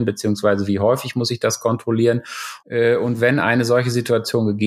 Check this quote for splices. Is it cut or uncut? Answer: cut